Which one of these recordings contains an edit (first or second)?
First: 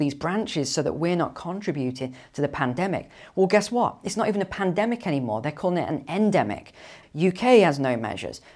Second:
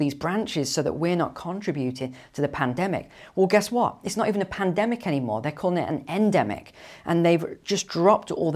first